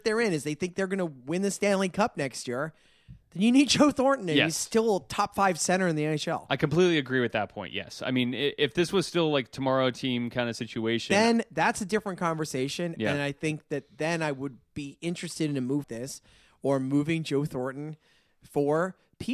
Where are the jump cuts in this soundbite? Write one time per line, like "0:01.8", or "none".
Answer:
0:15.8